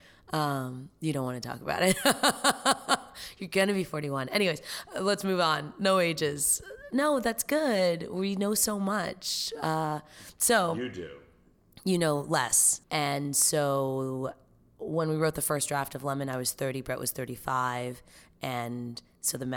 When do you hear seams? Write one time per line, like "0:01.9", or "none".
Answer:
0:12.8